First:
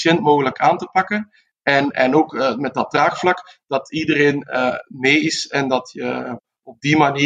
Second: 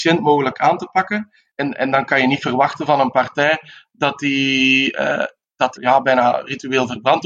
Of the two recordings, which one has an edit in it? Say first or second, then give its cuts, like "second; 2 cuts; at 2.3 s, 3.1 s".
second; 2 cuts; at 1.5 s, 5.8 s